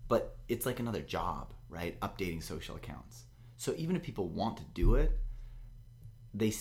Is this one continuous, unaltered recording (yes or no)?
yes